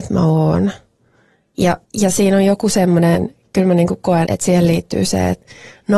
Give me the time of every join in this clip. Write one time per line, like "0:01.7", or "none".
0:01.8
0:04.2